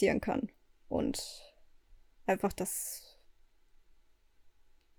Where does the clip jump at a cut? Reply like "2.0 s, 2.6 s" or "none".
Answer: none

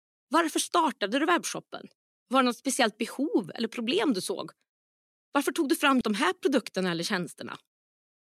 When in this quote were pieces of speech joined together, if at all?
6.0 s

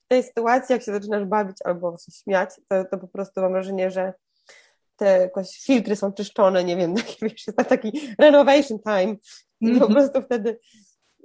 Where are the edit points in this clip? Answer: none

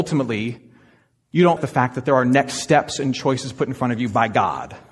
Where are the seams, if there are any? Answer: 1.6 s

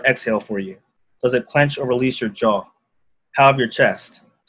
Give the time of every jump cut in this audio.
none

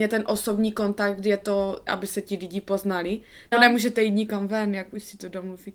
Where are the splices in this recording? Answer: 1.9 s, 3.5 s

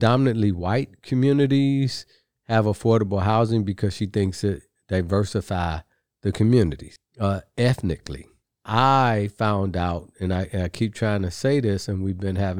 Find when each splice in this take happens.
none

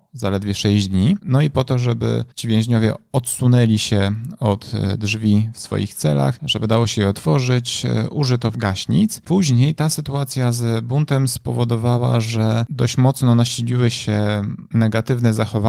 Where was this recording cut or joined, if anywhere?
1.2 s

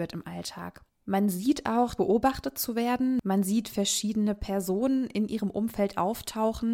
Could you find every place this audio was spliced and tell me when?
2.0 s

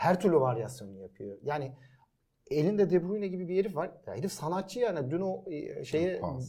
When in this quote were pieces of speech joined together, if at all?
none

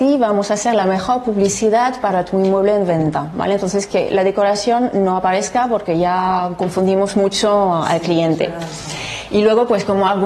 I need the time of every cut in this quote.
none

